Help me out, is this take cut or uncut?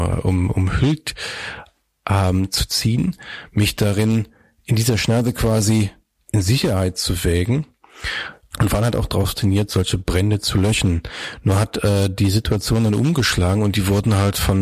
cut